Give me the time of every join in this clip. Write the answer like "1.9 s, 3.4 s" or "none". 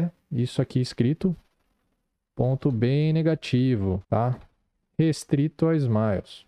4.0 s

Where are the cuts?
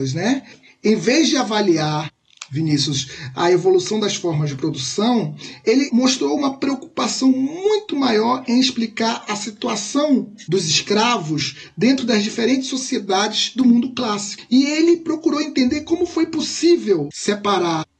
none

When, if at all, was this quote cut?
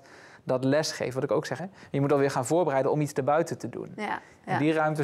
1.6 s

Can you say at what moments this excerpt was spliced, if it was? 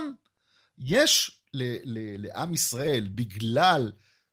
none

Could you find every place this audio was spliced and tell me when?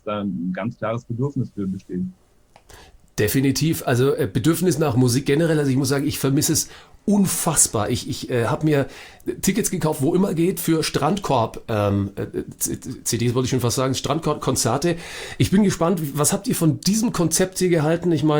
none

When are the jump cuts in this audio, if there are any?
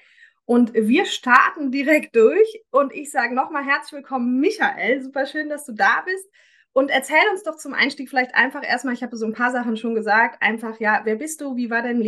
none

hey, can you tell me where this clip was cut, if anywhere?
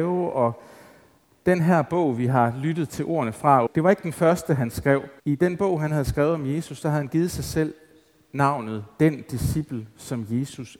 3.7 s, 5.2 s

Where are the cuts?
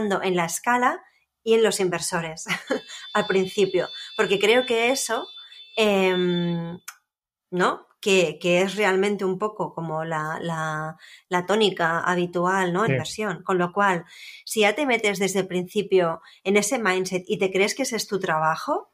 8.4 s, 12.9 s

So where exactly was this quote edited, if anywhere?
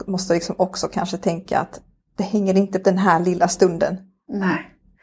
2.8 s

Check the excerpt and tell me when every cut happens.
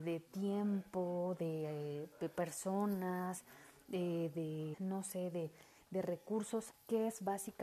4.7 s, 6.7 s

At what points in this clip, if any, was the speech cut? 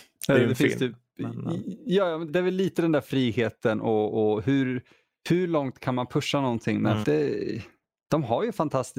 2.3 s, 7.0 s

